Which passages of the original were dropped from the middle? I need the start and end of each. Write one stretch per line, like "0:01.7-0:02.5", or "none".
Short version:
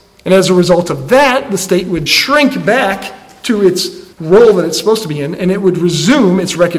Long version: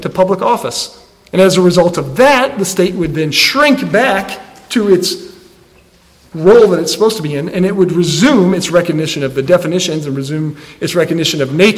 0:03.1-0:03.3
0:05.4-0:06.3